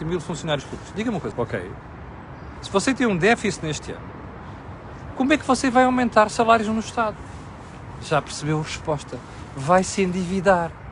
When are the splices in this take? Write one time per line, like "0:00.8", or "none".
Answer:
0:01.3